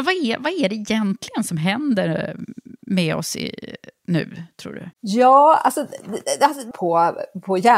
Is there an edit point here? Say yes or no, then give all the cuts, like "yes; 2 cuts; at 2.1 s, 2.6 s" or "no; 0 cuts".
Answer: yes; 2 cuts; at 4.9 s, 6.7 s